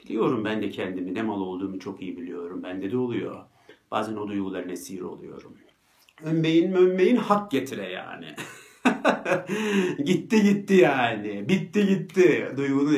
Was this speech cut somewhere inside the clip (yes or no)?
no